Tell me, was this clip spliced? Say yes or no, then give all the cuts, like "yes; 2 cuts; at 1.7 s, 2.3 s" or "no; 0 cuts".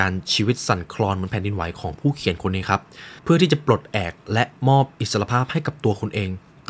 yes; 1 cut; at 3.2 s